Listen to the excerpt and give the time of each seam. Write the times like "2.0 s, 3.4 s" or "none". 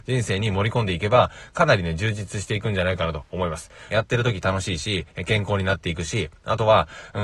3.9 s